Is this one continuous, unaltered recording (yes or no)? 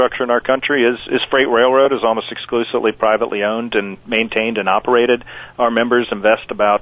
yes